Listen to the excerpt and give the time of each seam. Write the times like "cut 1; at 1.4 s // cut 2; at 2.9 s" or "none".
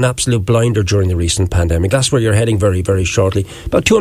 cut 1; at 1.9 s